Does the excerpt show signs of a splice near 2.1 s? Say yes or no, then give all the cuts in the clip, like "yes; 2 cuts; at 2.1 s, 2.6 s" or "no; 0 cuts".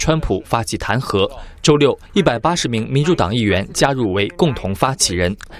yes; 1 cut; at 2.1 s